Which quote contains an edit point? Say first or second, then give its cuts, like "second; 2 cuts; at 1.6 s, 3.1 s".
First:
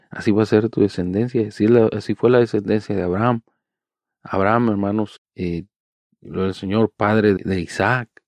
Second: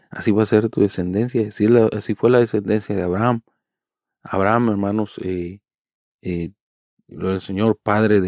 first; 2 cuts; at 5.2 s, 7.4 s